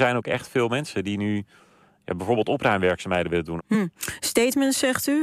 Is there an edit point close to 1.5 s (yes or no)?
no